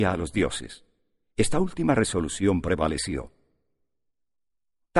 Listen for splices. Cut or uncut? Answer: uncut